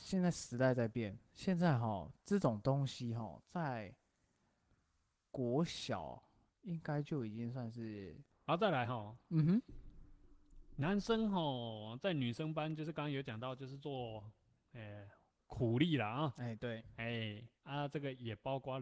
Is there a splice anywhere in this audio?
yes; 2 cuts; at 8.3 s, 17.6 s

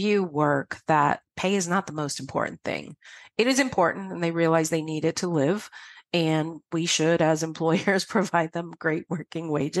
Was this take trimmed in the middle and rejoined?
no; 0 cuts

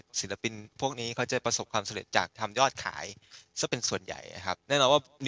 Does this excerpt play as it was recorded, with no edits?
yes; 0 cuts

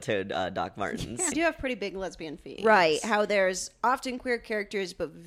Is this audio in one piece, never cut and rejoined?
no; 2 cuts; at 1.3 s, 2.6 s

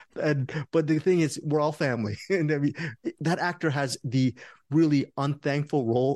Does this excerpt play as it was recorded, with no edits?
yes; 0 cuts

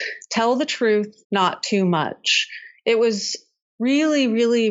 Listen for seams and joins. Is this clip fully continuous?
no; 1 cut; at 1.2 s

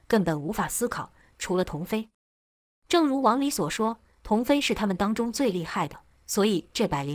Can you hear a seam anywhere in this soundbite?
yes; 1 cut; at 1.3 s

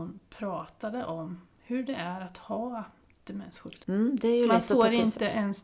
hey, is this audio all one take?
no; 1 cut; at 3.8 s

